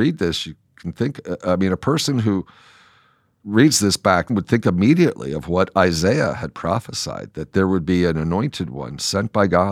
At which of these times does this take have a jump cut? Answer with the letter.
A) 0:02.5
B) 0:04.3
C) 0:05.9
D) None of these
B